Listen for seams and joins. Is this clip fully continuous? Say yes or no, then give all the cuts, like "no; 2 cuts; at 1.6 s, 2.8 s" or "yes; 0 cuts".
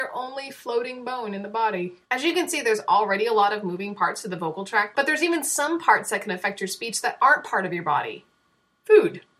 no; 1 cut; at 4.9 s